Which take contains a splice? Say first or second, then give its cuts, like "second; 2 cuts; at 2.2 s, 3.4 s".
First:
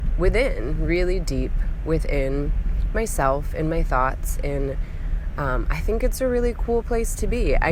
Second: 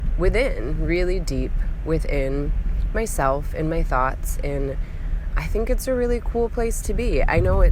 second; 1 cut; at 5.3 s